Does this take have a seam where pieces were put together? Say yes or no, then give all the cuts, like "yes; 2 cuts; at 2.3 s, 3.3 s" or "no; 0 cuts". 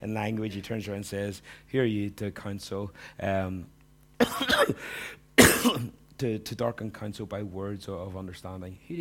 no; 0 cuts